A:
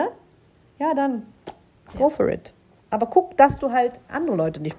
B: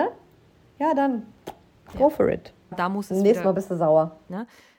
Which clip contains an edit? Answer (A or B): B